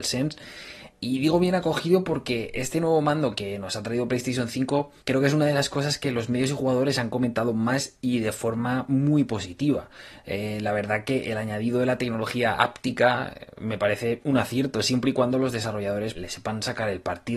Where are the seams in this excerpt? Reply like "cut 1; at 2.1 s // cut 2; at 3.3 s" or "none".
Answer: cut 1; at 5.0 s // cut 2; at 16.1 s